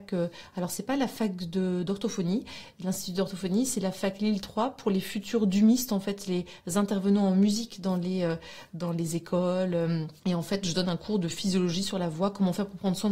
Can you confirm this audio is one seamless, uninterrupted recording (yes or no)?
no